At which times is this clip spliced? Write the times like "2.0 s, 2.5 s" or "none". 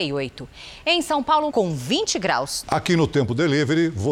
1.5 s, 2.6 s